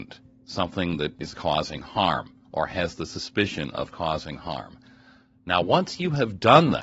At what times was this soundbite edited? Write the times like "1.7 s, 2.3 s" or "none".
none